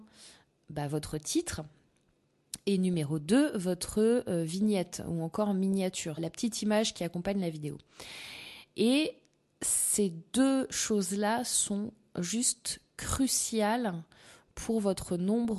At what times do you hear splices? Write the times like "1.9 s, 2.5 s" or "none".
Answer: 6.2 s